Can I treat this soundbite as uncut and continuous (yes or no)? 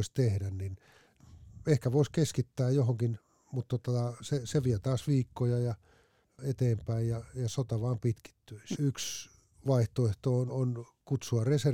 no